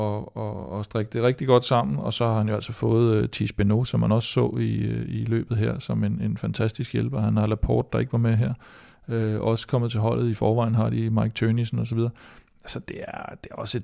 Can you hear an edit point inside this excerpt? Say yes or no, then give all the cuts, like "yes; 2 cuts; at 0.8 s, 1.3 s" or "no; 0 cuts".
no; 0 cuts